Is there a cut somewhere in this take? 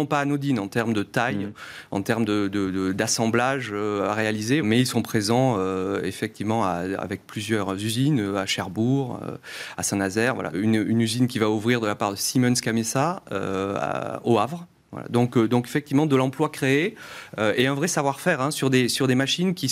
yes; 2 cuts; at 4.6 s, 10.5 s

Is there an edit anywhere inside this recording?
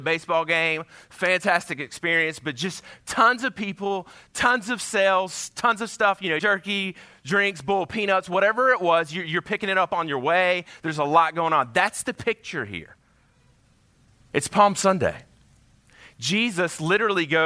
yes; 1 cut; at 6.4 s

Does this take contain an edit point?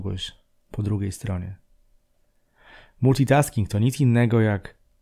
no; 0 cuts

